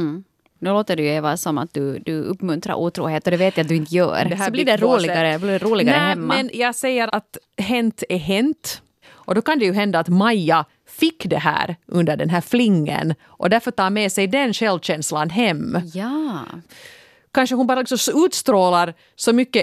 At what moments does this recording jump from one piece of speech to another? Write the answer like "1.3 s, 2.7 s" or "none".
4.3 s, 7.1 s, 9.0 s